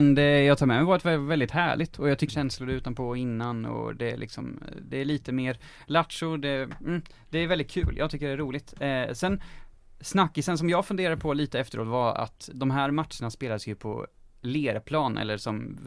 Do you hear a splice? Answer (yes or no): yes